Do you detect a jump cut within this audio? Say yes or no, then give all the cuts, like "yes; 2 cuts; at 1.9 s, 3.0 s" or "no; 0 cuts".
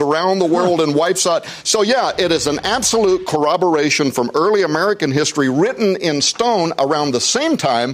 no; 0 cuts